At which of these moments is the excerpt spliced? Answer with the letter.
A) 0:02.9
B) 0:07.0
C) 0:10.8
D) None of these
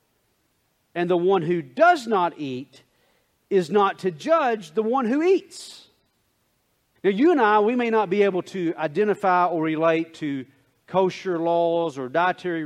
B